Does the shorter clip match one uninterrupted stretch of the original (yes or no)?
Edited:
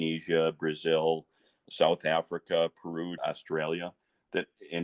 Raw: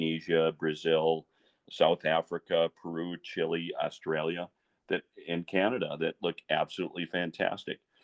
no